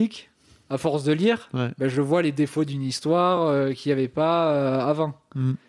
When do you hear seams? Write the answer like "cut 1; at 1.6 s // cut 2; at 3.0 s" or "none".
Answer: none

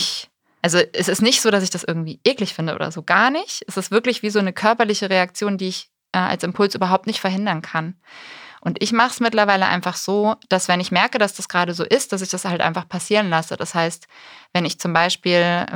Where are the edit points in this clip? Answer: none

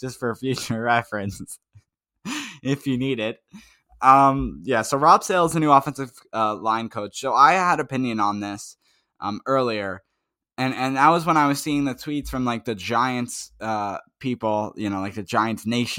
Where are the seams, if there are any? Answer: none

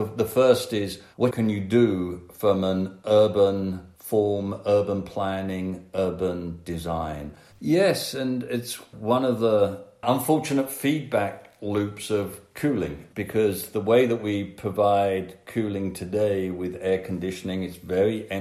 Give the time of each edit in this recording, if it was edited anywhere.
cut 1; at 1.1 s // cut 2; at 7.5 s

